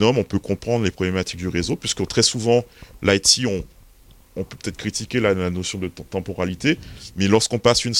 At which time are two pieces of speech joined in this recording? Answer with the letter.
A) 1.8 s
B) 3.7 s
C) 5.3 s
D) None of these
D